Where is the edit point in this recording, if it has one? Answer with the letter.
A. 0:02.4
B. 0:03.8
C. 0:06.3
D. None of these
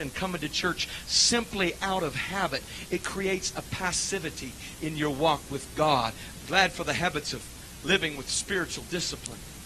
C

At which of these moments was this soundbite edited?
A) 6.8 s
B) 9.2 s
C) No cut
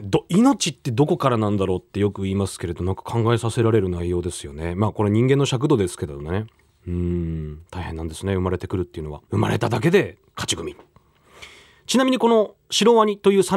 B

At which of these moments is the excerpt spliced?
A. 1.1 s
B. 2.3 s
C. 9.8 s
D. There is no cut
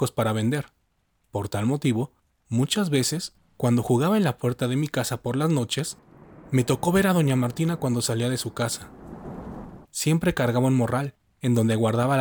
C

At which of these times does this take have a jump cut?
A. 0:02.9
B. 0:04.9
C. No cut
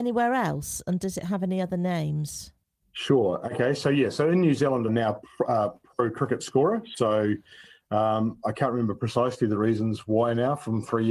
B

